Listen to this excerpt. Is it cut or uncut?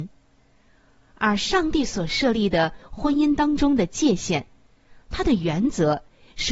uncut